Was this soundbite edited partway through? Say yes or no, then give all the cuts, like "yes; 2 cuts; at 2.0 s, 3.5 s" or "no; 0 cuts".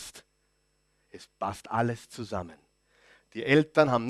no; 0 cuts